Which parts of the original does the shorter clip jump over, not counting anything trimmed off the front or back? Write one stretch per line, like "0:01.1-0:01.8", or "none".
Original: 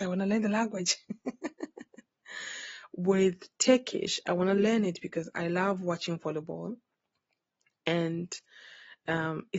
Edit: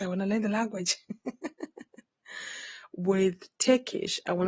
none